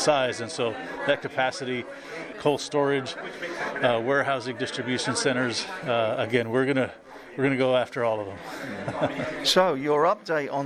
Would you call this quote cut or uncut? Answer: cut